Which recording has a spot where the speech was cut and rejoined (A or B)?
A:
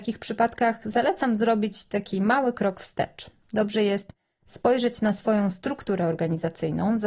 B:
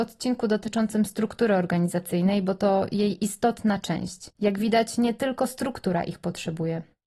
B